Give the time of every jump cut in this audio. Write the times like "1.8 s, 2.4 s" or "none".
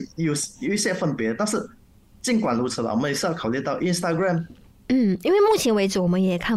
4.7 s